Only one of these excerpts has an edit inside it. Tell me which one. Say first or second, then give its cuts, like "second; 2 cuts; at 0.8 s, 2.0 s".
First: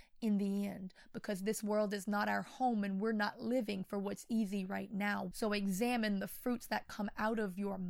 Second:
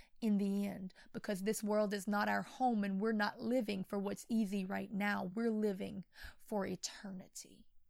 first; 1 cut; at 5.3 s